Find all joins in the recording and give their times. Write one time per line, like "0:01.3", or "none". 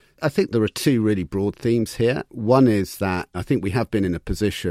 0:03.3